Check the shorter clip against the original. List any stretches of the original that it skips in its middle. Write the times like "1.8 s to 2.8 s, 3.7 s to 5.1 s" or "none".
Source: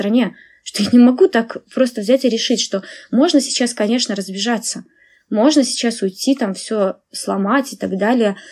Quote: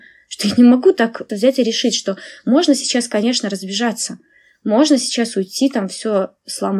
1.6 s to 2.0 s